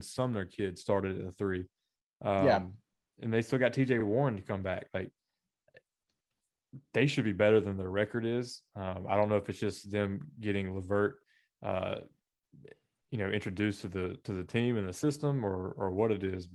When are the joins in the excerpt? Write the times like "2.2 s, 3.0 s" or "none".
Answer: none